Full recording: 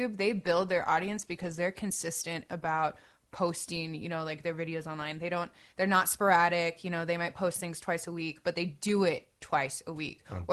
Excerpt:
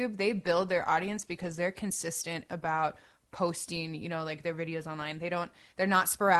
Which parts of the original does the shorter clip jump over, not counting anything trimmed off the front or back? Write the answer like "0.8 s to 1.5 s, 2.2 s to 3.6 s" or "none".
none